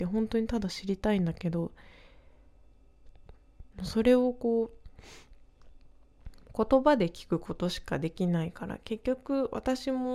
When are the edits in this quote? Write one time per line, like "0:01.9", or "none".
0:03.7